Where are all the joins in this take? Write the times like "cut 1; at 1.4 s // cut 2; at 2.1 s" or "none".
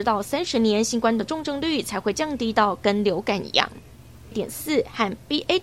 cut 1; at 4.3 s